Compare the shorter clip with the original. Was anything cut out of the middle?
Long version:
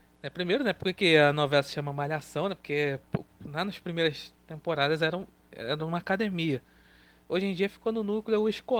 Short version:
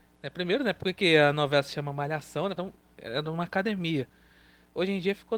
yes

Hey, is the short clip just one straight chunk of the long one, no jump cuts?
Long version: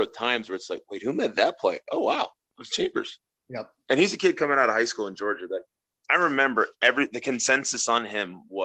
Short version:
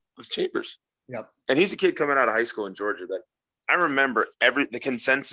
yes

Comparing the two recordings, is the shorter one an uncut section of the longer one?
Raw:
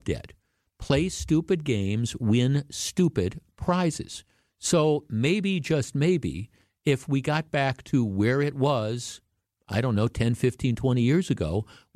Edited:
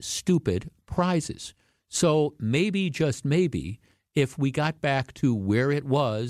yes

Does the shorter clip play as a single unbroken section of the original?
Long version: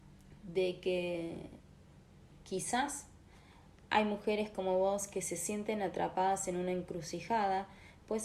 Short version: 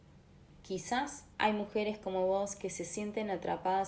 no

